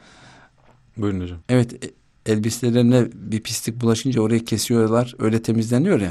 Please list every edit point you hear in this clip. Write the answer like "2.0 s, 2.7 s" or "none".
1.4 s

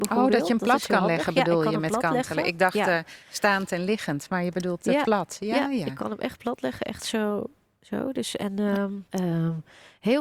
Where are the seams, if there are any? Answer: 9.1 s

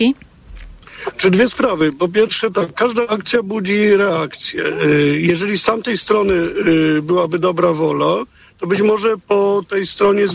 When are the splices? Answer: none

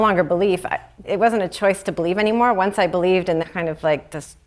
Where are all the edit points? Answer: 1.0 s, 3.4 s

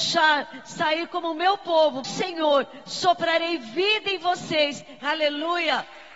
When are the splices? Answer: 2.0 s, 5.0 s

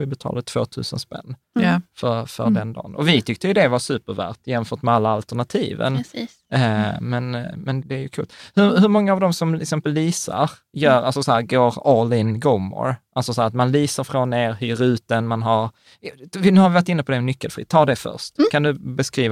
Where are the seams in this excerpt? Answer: 7.8 s

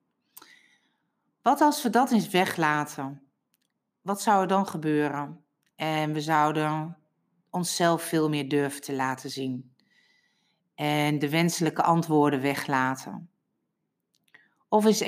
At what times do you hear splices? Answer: none

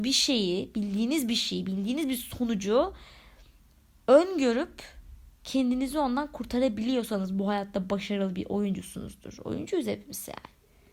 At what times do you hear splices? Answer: none

